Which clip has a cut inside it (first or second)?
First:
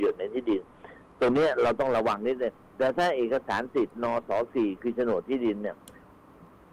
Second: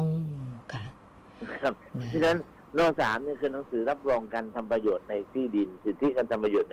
second